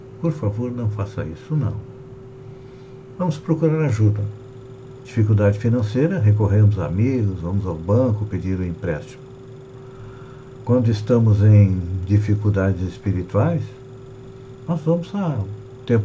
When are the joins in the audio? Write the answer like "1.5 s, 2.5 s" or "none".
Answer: 5.0 s